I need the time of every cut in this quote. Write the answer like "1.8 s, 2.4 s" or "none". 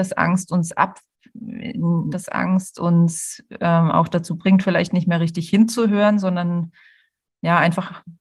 2.1 s